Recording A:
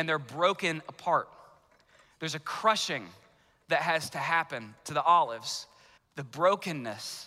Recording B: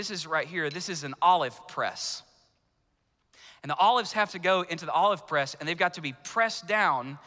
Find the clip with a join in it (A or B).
A